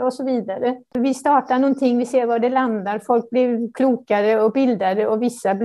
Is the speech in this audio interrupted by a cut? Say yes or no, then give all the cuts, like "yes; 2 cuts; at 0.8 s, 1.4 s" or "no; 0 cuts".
yes; 1 cut; at 0.9 s